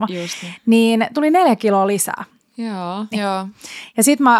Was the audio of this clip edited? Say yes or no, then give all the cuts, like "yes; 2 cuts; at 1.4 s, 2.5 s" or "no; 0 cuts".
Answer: yes; 1 cut; at 3.1 s